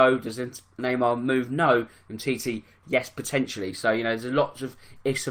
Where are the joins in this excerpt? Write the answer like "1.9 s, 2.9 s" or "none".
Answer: none